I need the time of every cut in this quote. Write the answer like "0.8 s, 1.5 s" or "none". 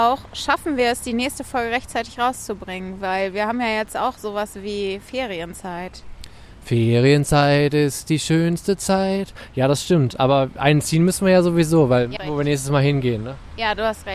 12.2 s